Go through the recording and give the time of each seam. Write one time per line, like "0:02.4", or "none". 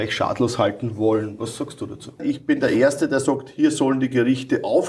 0:02.2